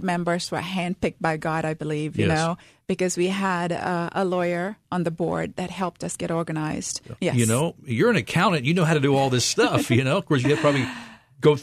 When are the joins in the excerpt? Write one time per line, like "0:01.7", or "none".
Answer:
0:07.2